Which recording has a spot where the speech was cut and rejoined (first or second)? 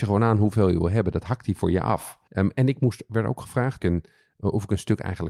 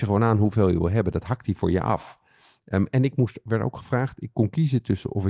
first